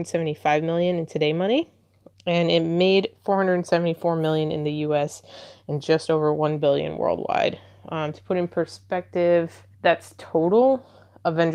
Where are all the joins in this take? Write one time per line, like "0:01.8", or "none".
0:09.7